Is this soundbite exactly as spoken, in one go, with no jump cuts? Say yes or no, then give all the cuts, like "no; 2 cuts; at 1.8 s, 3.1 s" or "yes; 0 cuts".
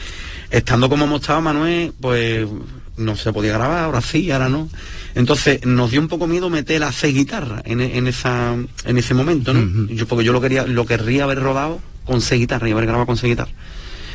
yes; 0 cuts